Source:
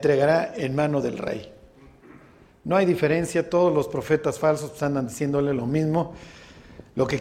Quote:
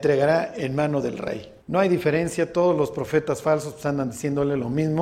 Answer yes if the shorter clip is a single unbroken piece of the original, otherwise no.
no